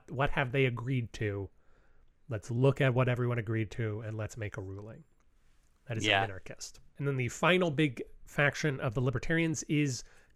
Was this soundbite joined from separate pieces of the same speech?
no; 0 cuts

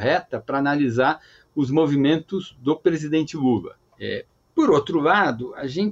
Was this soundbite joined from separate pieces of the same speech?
yes; 1 cut; at 3.9 s

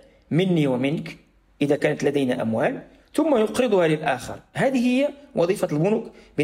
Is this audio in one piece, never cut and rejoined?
yes; 0 cuts

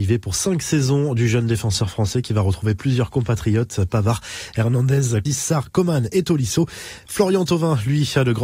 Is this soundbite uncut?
no; 1 cut; at 5.3 s

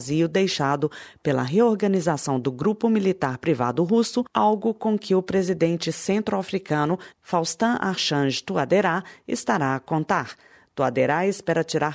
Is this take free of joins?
yes; 0 cuts

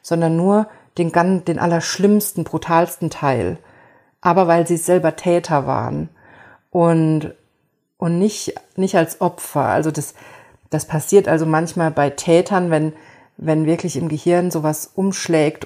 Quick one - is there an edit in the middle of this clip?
no; 0 cuts

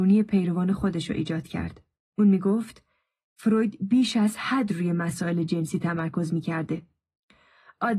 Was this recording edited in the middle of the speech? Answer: no; 0 cuts

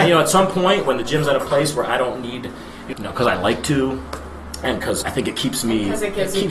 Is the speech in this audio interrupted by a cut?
yes; 2 cuts; at 2.9 s, 5.0 s

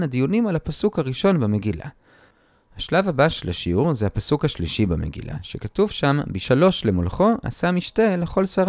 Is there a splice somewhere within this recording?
no; 0 cuts

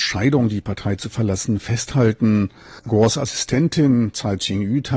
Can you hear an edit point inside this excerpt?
no; 0 cuts

